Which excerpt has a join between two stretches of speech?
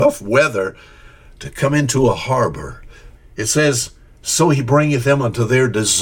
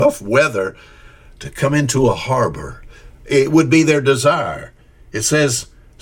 first; 1 cut; at 3.2 s

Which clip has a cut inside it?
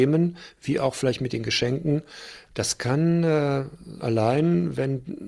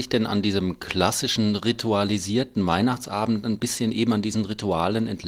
first; 2 cuts; at 2.5 s, 4.0 s

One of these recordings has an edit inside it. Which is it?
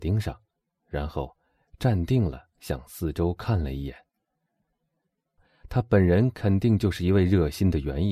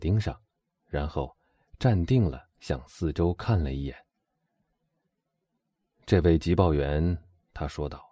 first; 1 cut; at 5.4 s

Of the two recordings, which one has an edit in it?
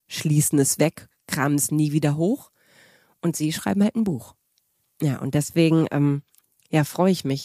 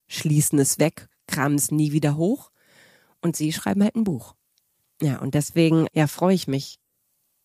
second; 1 cut; at 5.9 s

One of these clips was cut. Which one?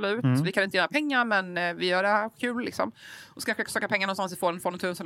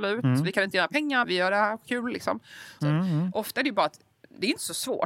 second; 2 cuts; at 1.2 s, 2.8 s

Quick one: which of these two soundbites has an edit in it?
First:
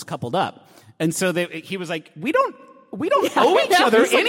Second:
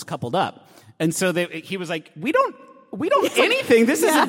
second; 1 cut; at 3.3 s

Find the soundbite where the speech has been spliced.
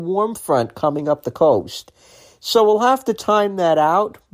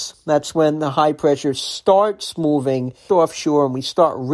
second; 1 cut; at 3.1 s

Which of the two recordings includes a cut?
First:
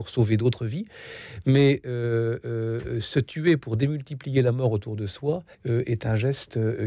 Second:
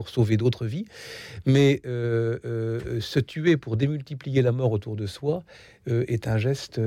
first; 1 cut; at 5.5 s

